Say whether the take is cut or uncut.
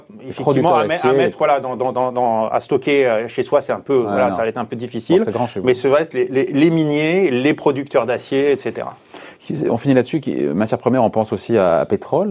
uncut